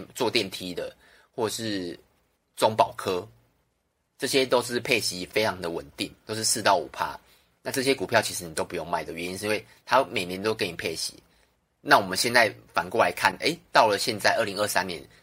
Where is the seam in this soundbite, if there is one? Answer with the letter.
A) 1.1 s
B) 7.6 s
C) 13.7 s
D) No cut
D